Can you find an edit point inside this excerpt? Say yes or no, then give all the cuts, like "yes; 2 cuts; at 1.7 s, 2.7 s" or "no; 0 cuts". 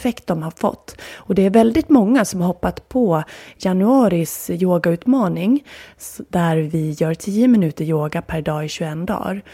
no; 0 cuts